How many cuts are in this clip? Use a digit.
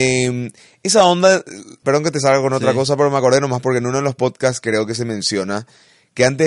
1